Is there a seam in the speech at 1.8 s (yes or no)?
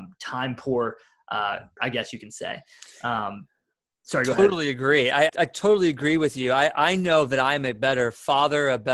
yes